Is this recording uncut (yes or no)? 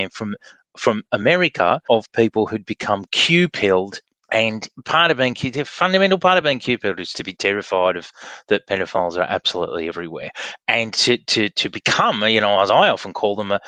yes